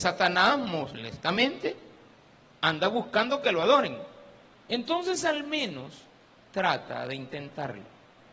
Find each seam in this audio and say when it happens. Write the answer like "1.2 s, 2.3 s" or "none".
4.5 s